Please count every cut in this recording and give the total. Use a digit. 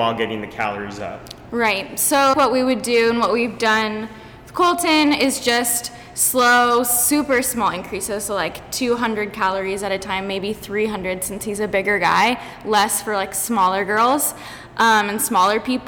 1